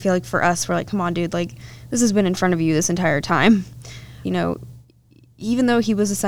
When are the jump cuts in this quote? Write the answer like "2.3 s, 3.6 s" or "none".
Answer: 4.2 s

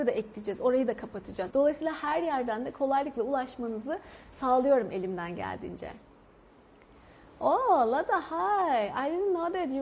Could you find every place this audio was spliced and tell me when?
1.5 s

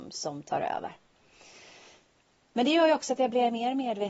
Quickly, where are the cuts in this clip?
none

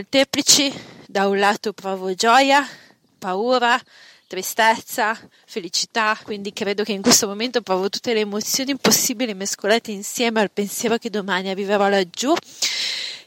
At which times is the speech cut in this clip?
none

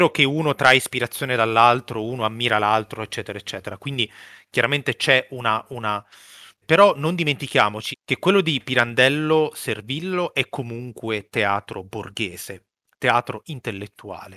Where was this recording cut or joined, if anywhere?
6.6 s, 7.9 s

